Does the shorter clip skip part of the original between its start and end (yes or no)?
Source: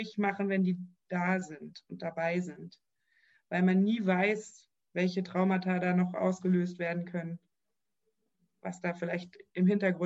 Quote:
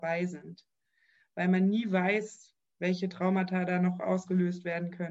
no